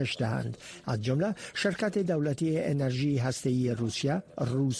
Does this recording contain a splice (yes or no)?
no